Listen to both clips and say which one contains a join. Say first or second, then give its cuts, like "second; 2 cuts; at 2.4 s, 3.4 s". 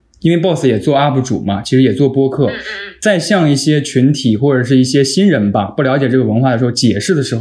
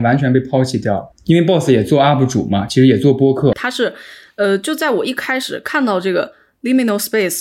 second; 2 cuts; at 1.1 s, 3.5 s